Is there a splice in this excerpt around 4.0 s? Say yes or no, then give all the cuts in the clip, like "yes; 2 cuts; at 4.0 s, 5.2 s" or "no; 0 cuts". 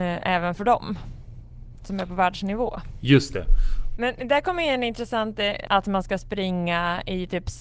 yes; 2 cuts; at 4.0 s, 5.7 s